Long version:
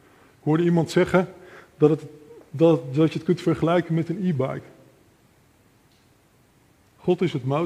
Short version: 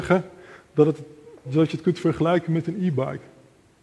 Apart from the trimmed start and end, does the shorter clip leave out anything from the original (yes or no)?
yes